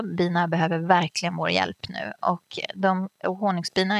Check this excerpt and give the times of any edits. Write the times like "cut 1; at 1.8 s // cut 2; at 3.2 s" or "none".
none